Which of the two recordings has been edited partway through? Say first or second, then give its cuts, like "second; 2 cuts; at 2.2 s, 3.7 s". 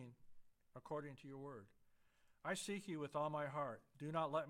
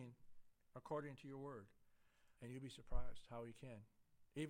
second; 1 cut; at 2.4 s